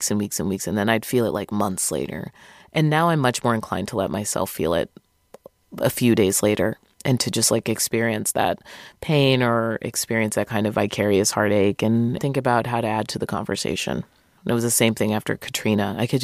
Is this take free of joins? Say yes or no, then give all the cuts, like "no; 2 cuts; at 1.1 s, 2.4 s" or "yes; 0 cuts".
no; 2 cuts; at 12.2 s, 14.4 s